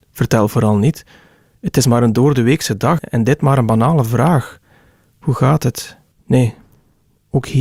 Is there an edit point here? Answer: yes; 3 cuts; at 1.5 s, 3.0 s, 6.1 s

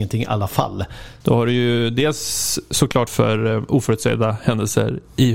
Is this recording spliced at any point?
yes; 2 cuts; at 1.2 s, 3.1 s

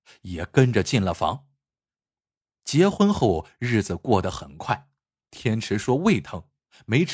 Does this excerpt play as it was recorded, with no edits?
no; 2 cuts; at 2.4 s, 5.3 s

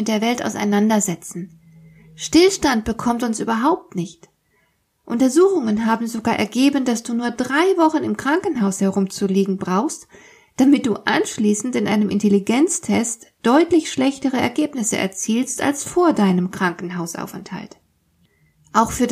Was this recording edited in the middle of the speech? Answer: no; 0 cuts

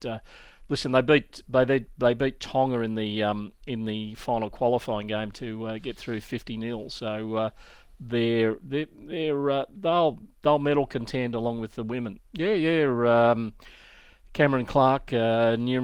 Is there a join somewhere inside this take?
yes; 1 cut; at 12.2 s

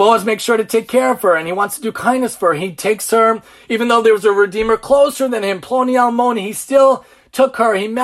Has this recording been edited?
no; 0 cuts

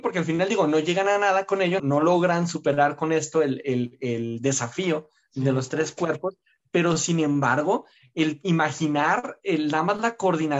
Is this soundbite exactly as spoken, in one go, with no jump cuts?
no; 1 cut; at 1.8 s

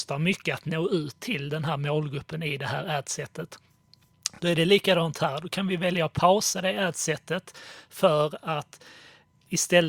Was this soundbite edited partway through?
no; 0 cuts

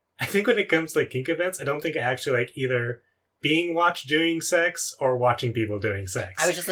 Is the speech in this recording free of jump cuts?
yes; 0 cuts

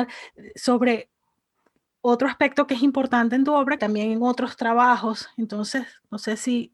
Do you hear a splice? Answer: yes; 1 cut; at 3.8 s

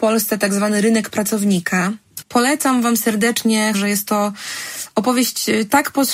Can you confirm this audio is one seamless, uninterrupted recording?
no; 2 cuts; at 2.2 s, 3.7 s

